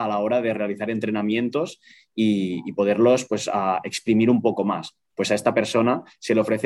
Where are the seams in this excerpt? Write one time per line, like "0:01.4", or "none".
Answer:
none